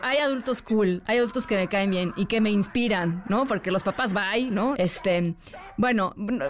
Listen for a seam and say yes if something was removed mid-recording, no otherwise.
yes